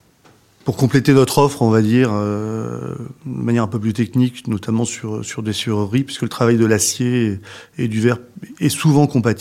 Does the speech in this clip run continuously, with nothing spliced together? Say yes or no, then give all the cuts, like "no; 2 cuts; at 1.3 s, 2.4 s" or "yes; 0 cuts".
yes; 0 cuts